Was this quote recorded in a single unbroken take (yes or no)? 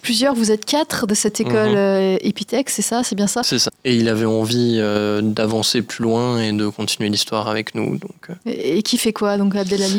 no